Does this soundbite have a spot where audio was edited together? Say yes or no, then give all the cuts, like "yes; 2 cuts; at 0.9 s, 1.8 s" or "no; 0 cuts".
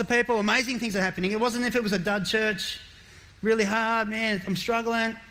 no; 0 cuts